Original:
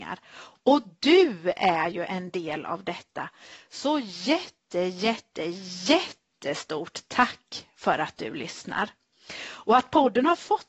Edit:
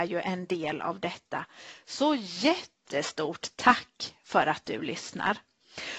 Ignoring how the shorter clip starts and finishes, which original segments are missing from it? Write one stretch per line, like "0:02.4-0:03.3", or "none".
0:04.7-0:06.4